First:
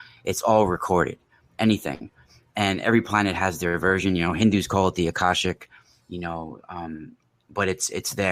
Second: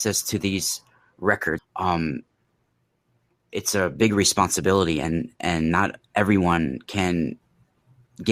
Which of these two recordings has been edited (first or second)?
second